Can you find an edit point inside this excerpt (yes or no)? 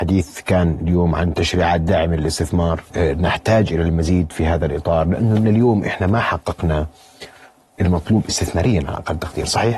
yes